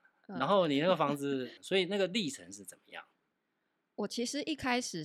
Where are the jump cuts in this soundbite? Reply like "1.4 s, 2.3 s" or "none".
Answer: 1.6 s